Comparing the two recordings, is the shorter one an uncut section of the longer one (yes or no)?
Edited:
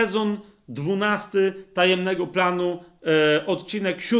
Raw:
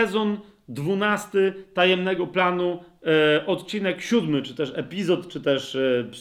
yes